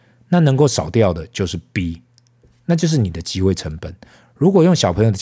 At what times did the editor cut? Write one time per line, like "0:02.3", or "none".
none